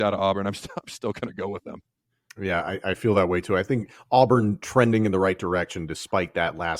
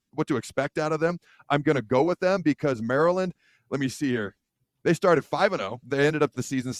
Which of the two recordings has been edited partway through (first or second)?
second